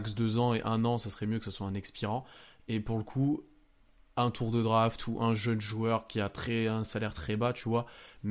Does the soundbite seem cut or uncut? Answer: uncut